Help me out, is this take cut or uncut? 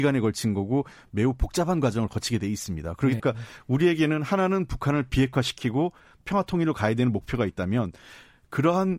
cut